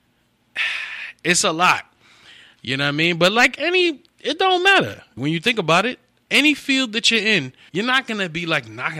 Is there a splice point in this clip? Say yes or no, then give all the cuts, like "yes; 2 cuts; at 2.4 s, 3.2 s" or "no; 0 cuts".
yes; 2 cuts; at 5.2 s, 7.7 s